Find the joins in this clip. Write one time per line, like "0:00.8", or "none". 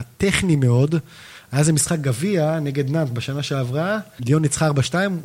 0:04.2